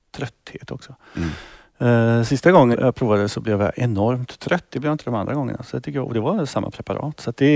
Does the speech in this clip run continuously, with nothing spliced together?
no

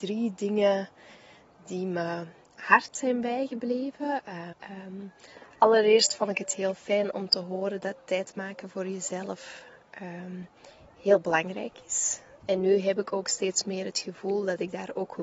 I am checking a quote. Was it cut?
yes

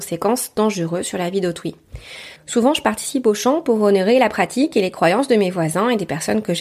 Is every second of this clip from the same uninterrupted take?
no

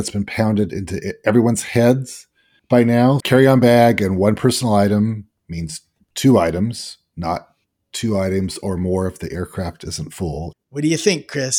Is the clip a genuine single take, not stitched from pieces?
no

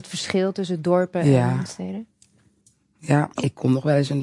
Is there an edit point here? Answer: yes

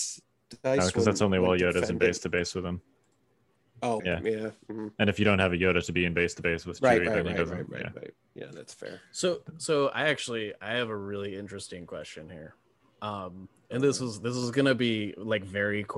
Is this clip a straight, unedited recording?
no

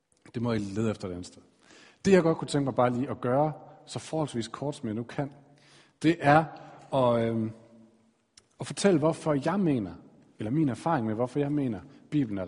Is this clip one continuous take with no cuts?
yes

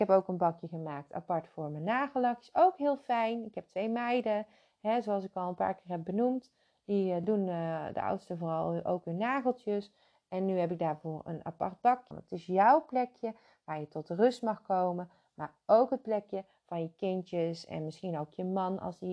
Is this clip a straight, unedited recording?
no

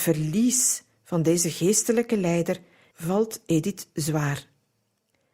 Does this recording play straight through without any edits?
no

